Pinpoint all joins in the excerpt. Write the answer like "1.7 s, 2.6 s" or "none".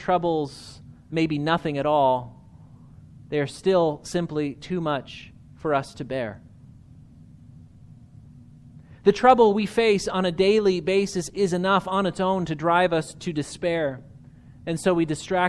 none